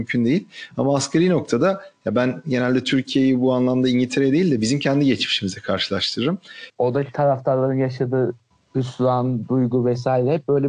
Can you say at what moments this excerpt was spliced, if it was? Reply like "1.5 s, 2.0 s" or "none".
6.7 s